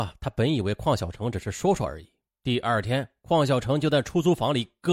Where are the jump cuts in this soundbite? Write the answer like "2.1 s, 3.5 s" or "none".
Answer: 2.3 s